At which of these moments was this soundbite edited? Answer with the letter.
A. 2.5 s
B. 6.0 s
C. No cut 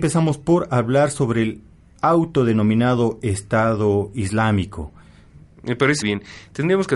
B